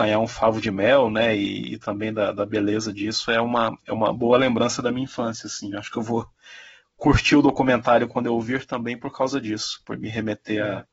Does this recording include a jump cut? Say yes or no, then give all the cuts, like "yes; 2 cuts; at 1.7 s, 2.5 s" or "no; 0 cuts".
no; 0 cuts